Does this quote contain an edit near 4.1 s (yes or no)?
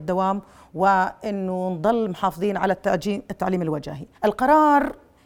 yes